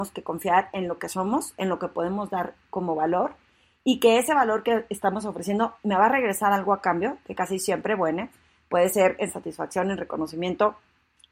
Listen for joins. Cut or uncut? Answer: uncut